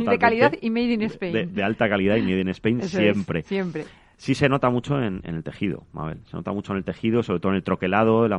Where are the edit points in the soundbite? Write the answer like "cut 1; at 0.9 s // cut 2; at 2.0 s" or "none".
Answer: none